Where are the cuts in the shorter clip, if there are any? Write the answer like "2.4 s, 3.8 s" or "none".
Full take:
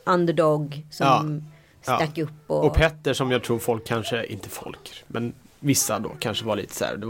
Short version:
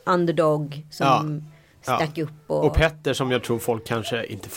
none